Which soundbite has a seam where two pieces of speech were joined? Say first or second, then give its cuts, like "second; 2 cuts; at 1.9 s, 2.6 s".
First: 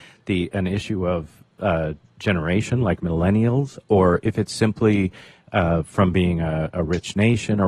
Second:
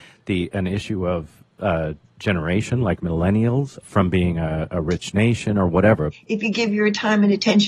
second; 2 cuts; at 3.8 s, 6.1 s